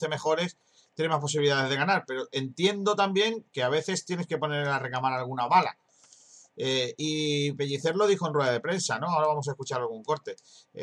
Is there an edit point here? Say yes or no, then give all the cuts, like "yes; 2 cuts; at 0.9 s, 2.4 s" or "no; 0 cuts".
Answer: no; 0 cuts